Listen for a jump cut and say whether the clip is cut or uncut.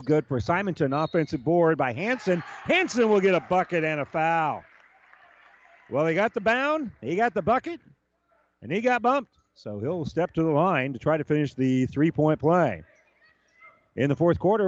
uncut